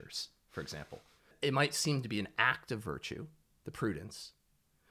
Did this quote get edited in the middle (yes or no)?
no